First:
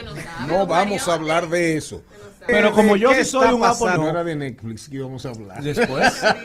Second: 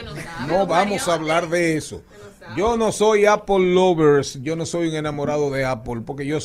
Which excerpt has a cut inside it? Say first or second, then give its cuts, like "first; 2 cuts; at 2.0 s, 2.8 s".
first; 2 cuts; at 2.5 s, 4.0 s